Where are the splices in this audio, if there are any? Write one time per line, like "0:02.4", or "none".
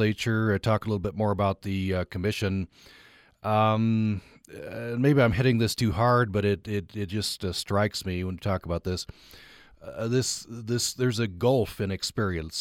none